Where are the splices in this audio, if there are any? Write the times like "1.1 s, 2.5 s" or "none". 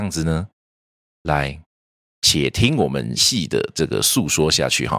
3.2 s